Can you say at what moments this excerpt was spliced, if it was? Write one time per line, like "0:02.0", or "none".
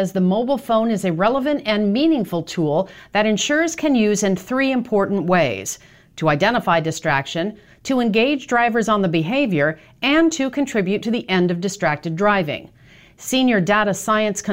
none